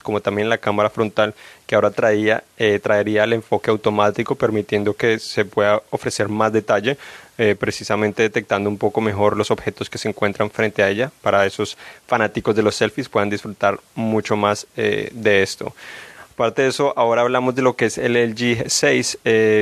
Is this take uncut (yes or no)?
yes